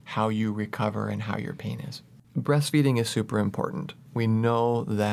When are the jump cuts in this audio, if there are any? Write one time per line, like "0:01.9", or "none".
0:02.2